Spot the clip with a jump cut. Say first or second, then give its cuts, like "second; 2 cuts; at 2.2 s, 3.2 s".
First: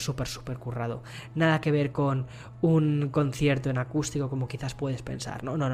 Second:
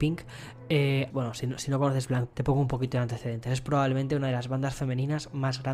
second; 2 cuts; at 1.1 s, 2.3 s